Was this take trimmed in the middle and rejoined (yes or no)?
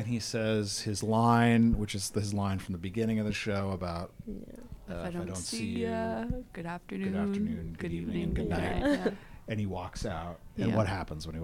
no